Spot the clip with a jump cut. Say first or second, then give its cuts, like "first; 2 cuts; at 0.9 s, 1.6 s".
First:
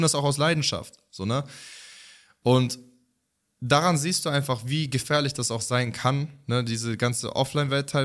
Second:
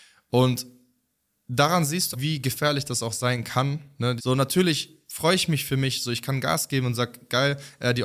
second; 2 cuts; at 2.1 s, 4.2 s